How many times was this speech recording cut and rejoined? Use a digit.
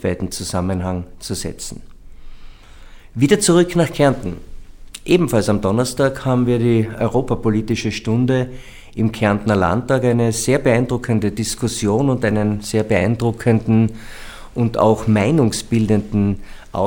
0